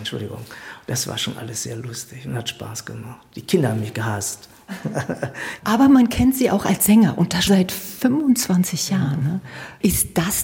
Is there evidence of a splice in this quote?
yes; 2 cuts; at 5.6 s, 7.5 s

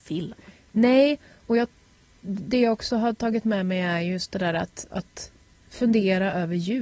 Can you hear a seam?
no; 0 cuts

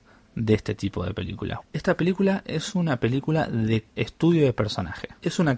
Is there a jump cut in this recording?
yes; 1 cut; at 1.6 s

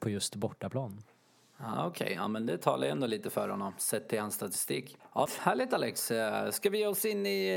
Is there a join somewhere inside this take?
yes; 1 cut; at 5.3 s

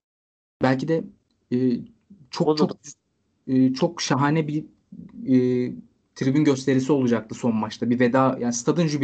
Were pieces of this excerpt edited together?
no; 0 cuts

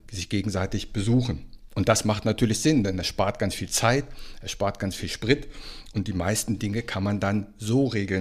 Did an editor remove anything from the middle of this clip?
no; 0 cuts

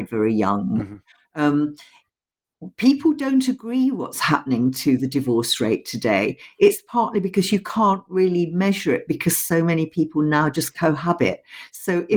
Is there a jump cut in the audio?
no; 0 cuts

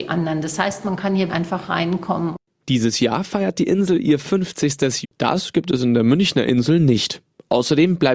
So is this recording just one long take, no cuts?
no; 3 cuts; at 1.3 s, 2.6 s, 5.0 s

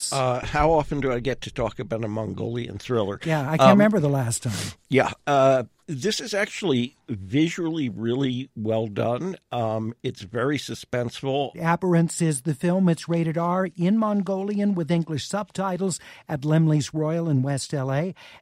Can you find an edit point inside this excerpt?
yes; 2 cuts; at 5.8 s, 11.5 s

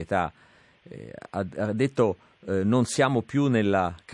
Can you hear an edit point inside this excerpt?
no; 0 cuts

